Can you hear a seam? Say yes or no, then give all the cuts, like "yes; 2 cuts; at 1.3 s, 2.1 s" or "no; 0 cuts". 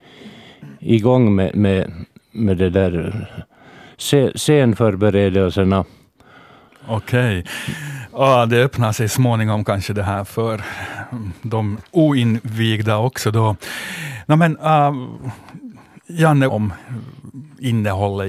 yes; 2 cuts; at 6.7 s, 16.5 s